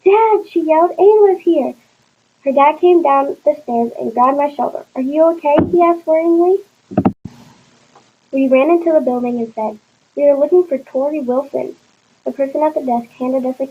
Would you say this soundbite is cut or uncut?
uncut